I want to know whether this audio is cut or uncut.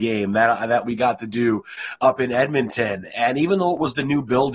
cut